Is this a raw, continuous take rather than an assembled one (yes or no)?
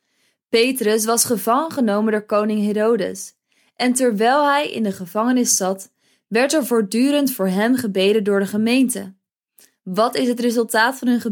yes